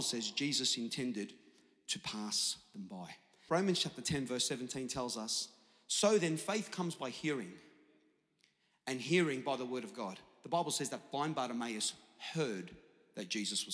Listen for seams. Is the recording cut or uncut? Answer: cut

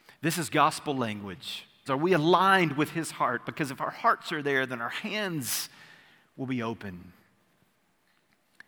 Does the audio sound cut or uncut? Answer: cut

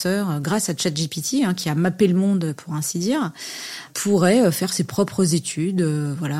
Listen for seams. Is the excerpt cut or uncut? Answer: uncut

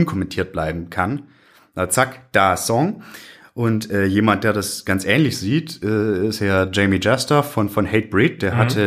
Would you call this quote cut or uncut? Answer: uncut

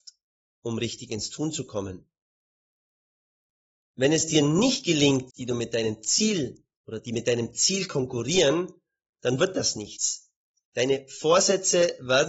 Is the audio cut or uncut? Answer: cut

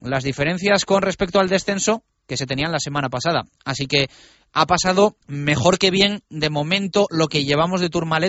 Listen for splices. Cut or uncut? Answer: cut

